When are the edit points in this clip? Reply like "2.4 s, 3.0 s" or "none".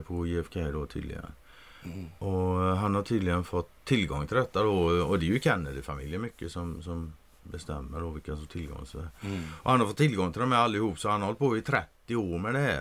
none